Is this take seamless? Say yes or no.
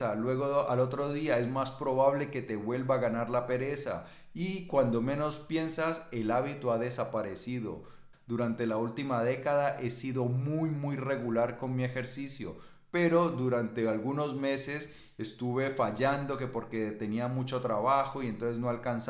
no